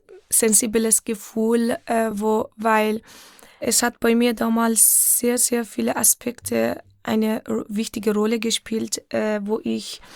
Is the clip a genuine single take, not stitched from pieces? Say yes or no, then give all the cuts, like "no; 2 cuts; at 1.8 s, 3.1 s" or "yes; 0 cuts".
yes; 0 cuts